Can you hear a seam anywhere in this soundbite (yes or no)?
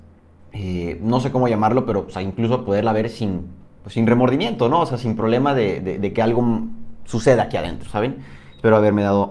no